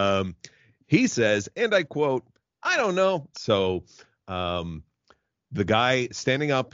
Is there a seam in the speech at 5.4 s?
no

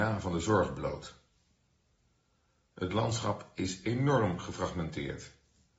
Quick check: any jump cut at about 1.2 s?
no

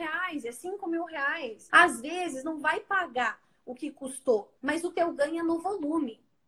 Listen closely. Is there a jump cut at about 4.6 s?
yes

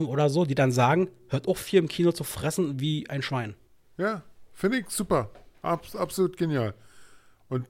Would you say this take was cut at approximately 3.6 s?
no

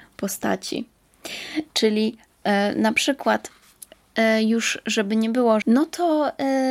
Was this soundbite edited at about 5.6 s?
yes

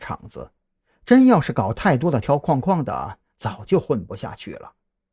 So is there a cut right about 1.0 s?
no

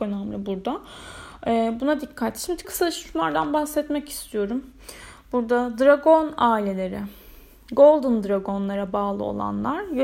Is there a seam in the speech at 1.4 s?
no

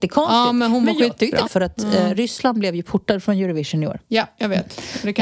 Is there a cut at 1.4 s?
yes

